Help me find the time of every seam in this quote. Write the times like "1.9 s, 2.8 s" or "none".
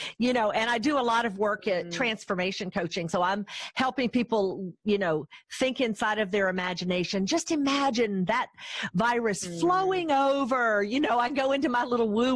none

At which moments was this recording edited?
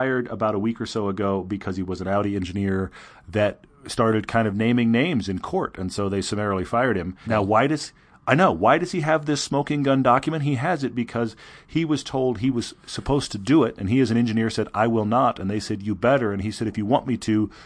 7.2 s

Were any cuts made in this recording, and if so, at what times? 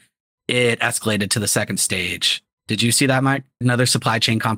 3.6 s

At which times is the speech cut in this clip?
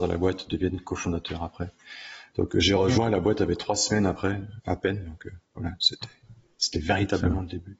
none

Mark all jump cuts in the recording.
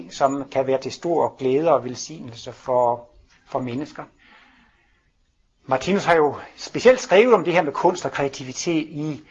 none

